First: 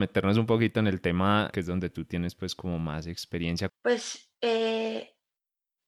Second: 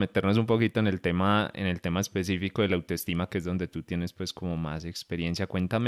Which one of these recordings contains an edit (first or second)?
first